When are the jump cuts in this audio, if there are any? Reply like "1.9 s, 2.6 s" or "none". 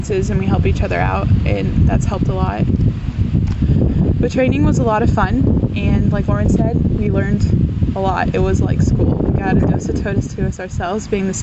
none